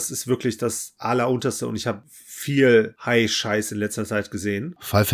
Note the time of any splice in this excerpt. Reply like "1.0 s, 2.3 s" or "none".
none